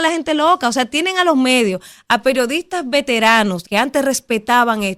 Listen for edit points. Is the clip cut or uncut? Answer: cut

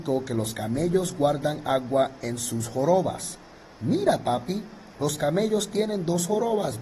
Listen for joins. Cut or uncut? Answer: uncut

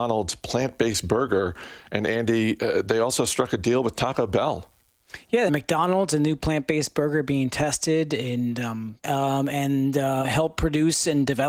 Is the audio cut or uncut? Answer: cut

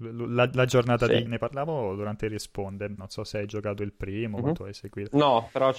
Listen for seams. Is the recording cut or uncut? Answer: cut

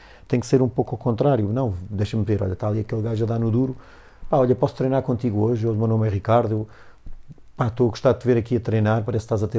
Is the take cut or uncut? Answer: uncut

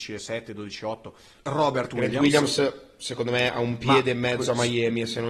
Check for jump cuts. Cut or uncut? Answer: cut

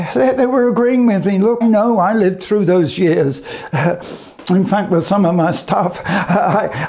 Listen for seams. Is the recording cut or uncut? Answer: cut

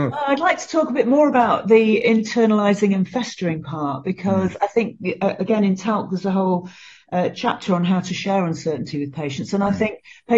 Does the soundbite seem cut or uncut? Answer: uncut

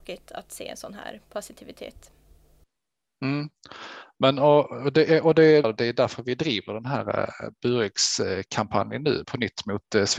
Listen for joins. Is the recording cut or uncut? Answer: cut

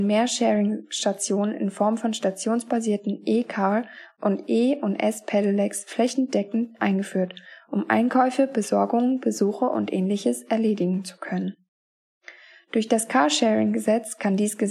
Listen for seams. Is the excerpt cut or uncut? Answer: uncut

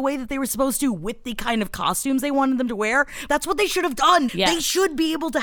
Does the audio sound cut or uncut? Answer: cut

